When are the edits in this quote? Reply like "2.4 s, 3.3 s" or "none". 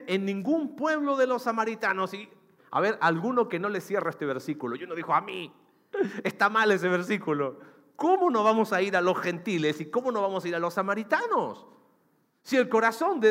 2.6 s